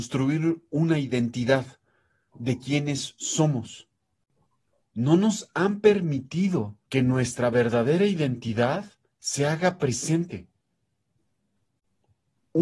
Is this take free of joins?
no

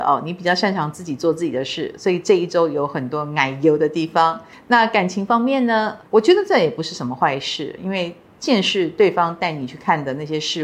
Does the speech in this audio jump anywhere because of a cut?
yes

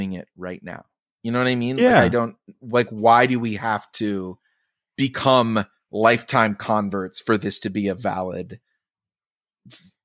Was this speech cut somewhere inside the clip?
no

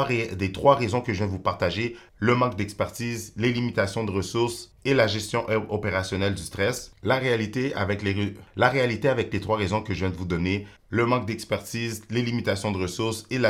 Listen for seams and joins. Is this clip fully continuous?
yes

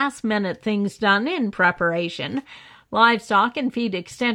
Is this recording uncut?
yes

